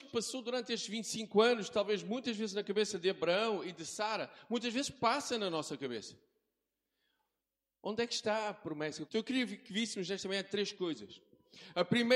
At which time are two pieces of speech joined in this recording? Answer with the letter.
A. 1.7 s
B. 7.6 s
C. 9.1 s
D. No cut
C